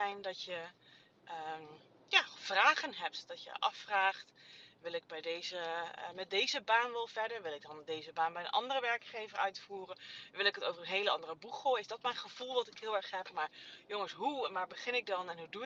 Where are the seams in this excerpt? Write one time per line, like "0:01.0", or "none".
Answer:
none